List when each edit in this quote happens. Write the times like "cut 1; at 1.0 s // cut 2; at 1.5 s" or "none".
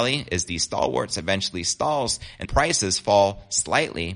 cut 1; at 2.4 s